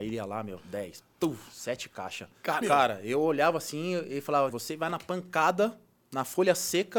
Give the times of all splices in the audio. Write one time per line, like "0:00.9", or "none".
0:02.6
0:04.5